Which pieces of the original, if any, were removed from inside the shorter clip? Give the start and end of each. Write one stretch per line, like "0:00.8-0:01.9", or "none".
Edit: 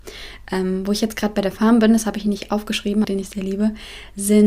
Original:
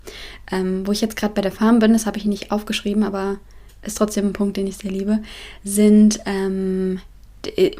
0:03.0-0:04.5